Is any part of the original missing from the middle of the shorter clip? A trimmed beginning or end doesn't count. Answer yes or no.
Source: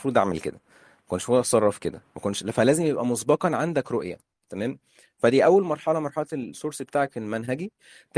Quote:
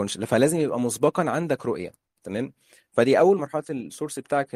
yes